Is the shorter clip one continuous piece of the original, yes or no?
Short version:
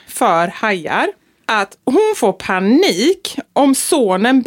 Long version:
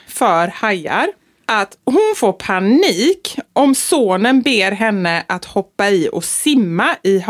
yes